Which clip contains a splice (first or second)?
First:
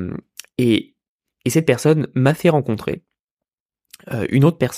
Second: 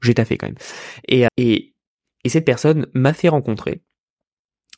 second